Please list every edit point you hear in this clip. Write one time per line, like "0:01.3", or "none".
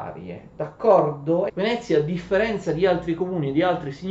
0:01.5